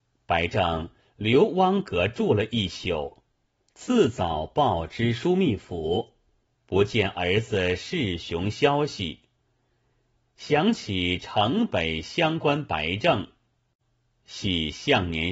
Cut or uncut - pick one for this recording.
cut